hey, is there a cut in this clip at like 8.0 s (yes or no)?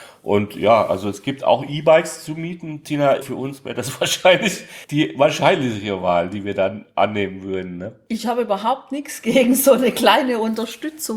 no